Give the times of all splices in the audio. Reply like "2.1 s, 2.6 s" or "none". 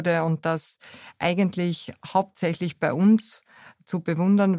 none